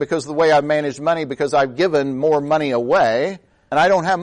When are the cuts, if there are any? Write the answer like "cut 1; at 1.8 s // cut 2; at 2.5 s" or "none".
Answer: none

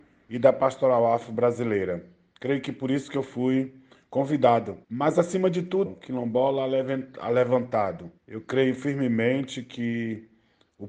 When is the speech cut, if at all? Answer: cut 1; at 4.8 s // cut 2; at 5.9 s // cut 3; at 8.2 s

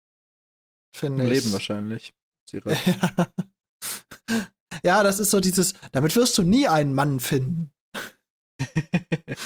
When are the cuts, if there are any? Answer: none

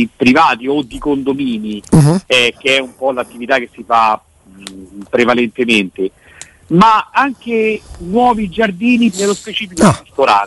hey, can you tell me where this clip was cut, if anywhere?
cut 1; at 7.1 s // cut 2; at 9.1 s

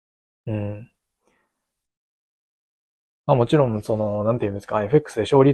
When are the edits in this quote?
none

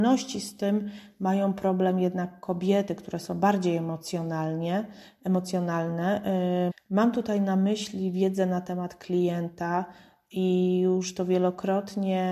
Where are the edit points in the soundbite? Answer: cut 1; at 6.7 s

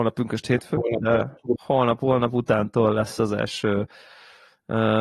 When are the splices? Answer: cut 1; at 1.6 s

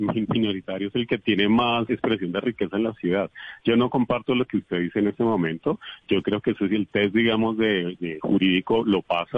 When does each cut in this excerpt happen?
cut 1; at 1.9 s // cut 2; at 8.0 s

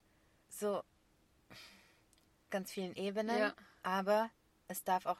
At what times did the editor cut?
cut 1; at 2.5 s

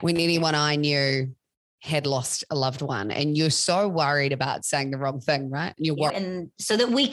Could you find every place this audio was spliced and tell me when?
cut 1; at 6.1 s

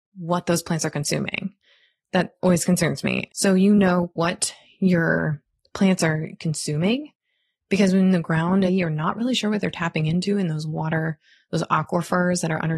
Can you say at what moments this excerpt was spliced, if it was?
cut 1; at 3.3 s // cut 2; at 8.7 s

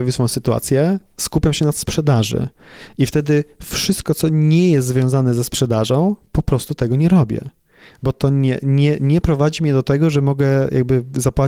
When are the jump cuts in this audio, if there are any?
none

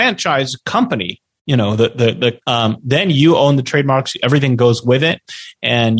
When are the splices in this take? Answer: cut 1; at 2.4 s

